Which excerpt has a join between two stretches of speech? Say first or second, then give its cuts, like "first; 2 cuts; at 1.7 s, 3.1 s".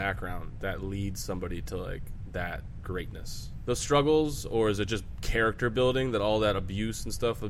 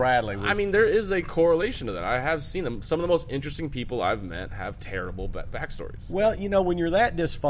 first; 1 cut; at 3.7 s